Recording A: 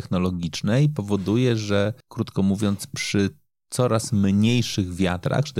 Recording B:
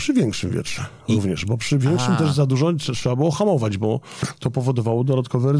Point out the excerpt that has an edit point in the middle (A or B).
A